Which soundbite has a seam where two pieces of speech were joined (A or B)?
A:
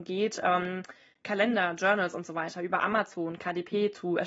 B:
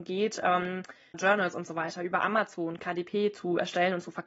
B